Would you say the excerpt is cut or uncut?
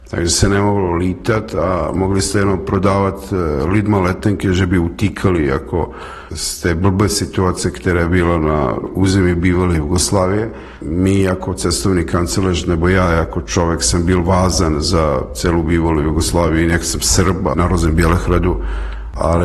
uncut